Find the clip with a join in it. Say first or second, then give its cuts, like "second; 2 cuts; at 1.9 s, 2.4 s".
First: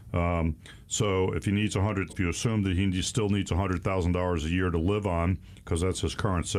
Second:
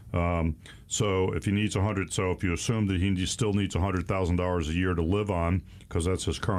first; 1 cut; at 2.1 s